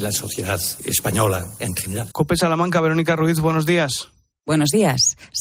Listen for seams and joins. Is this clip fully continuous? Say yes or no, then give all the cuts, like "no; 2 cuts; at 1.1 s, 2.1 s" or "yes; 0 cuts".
no; 1 cut; at 2.1 s